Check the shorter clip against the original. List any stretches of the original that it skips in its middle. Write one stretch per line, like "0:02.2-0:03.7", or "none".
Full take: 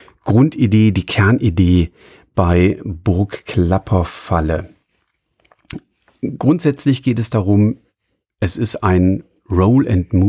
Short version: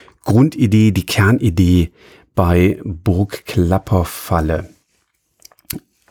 none